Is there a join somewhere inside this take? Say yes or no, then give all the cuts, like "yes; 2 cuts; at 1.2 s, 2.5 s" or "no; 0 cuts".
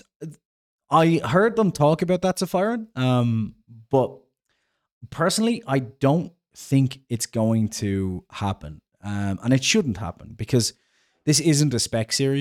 no; 0 cuts